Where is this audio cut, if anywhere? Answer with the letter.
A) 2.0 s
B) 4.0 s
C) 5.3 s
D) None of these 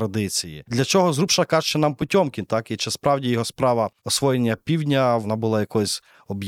B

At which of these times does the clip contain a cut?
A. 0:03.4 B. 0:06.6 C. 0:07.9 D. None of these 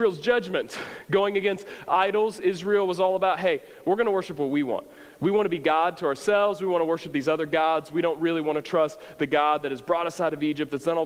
D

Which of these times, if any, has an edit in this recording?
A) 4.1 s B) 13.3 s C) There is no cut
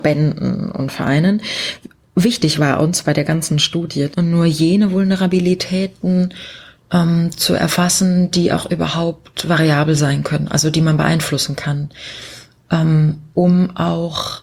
A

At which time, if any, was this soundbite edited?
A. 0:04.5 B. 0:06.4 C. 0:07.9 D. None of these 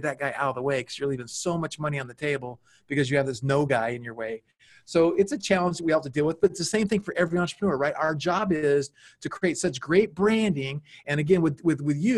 D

